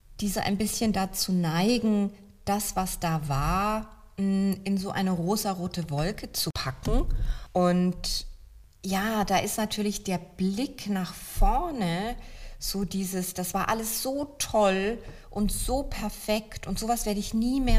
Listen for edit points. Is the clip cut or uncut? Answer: uncut